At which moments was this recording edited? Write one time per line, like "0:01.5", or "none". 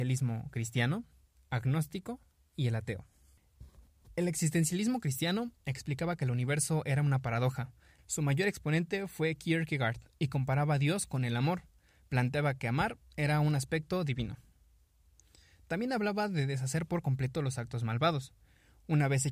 0:08.0